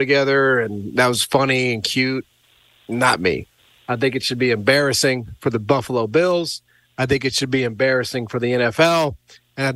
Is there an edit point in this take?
yes; 1 cut; at 3.8 s

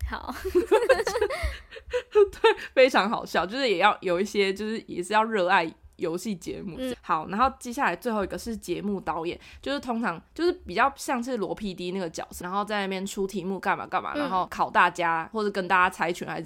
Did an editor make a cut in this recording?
yes; 2 cuts; at 6.9 s, 12.4 s

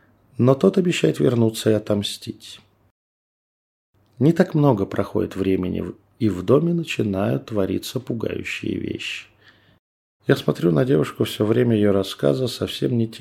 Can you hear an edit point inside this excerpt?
yes; 1 cut; at 10.2 s

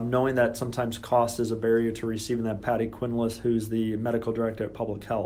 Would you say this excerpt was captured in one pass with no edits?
no; 1 cut; at 2.6 s

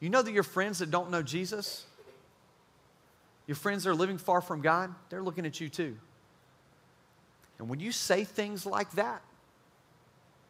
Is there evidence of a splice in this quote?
no; 0 cuts

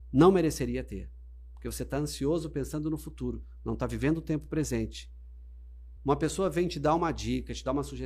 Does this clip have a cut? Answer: yes; 2 cuts; at 1.5 s, 6.0 s

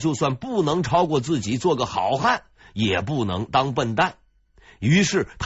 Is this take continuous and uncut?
yes; 0 cuts

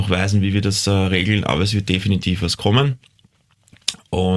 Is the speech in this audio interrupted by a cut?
no; 0 cuts

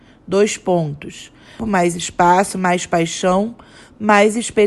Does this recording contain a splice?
yes; 1 cut; at 1.6 s

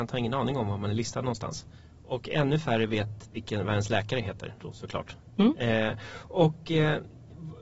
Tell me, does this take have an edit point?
no; 0 cuts

